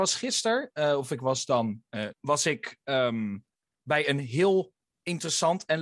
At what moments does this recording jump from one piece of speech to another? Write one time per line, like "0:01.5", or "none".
0:02.1

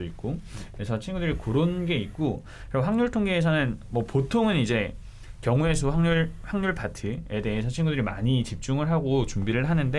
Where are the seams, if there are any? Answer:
none

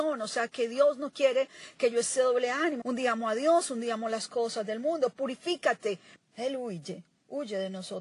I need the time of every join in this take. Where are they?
0:02.8
0:06.2

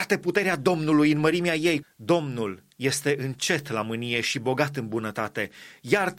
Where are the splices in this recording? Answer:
0:01.8

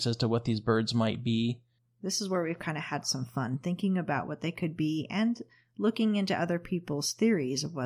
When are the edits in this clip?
none

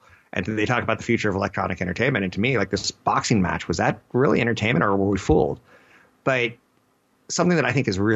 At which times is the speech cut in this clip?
none

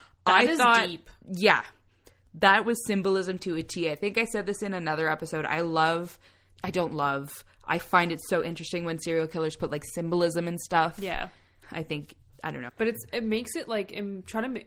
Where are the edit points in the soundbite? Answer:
0:11.6
0:12.7

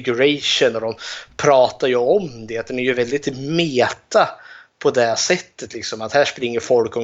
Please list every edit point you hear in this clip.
none

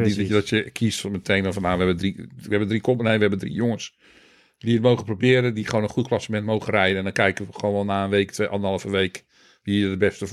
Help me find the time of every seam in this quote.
none

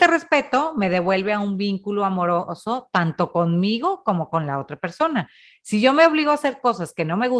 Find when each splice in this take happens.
none

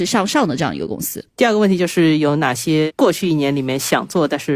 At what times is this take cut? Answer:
0:01.3

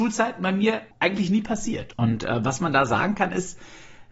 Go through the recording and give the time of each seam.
0:00.9
0:01.9

